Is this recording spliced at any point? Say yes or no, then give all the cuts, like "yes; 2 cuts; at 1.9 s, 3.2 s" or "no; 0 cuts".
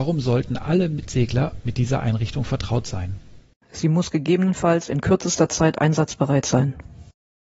yes; 1 cut; at 3.6 s